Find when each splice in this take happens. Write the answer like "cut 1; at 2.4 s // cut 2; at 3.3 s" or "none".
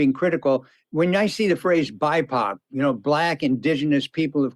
none